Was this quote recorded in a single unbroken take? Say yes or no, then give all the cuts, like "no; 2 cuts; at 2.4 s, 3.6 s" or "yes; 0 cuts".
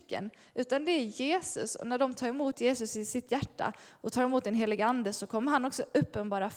yes; 0 cuts